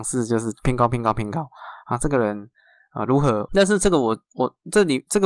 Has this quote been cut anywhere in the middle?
yes; 1 cut; at 3.5 s

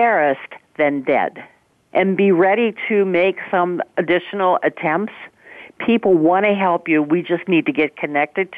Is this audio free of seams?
no; 1 cut; at 1.9 s

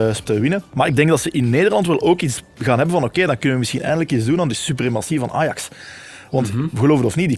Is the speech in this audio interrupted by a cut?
no; 0 cuts

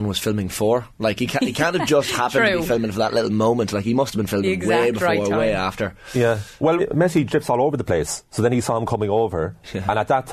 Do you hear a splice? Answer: yes; 1 cut; at 6.8 s

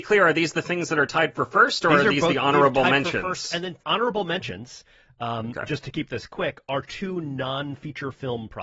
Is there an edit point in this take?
yes; 1 cut; at 3.8 s

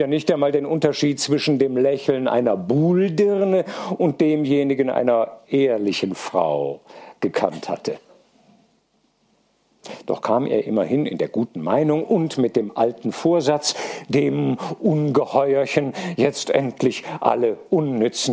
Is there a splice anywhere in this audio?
no; 0 cuts

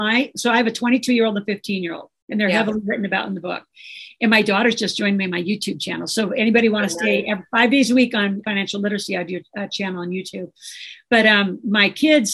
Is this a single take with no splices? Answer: no; 1 cut; at 8.4 s

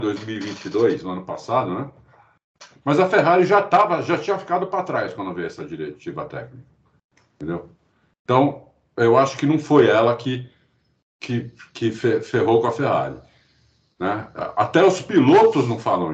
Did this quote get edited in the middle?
no; 0 cuts

